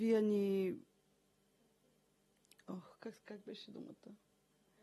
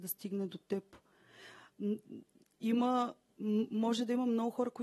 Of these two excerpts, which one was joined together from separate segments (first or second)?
second